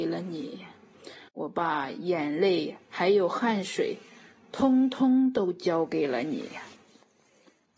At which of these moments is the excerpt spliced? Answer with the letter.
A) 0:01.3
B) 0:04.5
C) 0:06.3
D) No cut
A